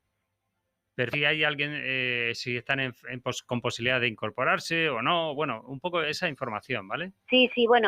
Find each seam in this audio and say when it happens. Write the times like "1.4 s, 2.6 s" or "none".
1.1 s